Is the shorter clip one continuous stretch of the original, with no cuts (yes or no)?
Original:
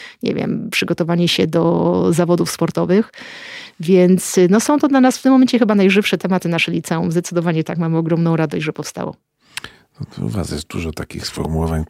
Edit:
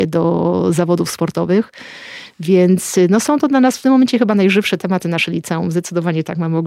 yes